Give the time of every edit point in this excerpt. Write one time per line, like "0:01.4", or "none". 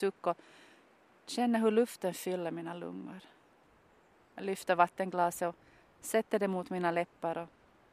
none